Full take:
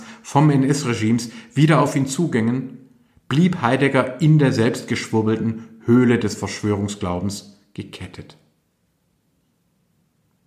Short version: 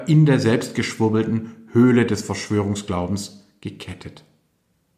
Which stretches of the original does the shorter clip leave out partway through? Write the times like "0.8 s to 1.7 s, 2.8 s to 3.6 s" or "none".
none